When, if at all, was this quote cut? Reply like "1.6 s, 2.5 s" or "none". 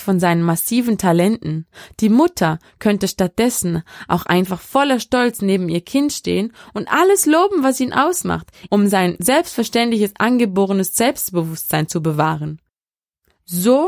8.7 s